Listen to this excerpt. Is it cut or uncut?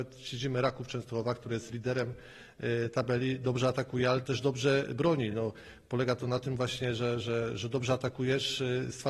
uncut